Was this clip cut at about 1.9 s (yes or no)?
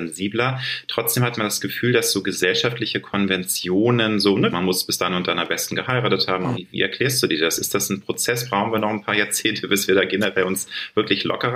no